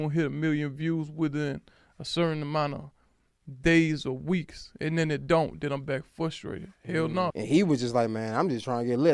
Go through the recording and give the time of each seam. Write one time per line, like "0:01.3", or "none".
0:07.3

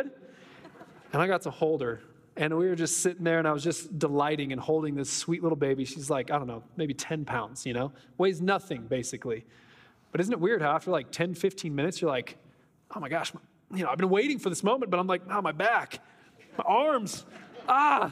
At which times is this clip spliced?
none

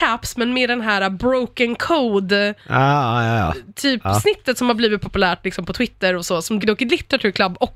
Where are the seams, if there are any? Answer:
0:06.6

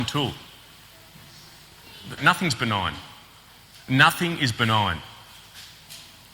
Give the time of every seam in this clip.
0:02.2

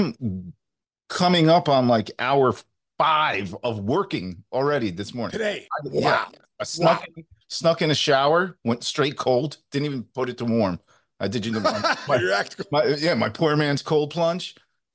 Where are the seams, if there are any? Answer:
0:12.1

